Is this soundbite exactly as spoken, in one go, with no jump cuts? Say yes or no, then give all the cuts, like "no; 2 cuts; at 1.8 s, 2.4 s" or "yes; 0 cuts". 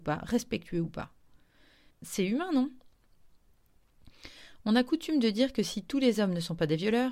no; 1 cut; at 1.9 s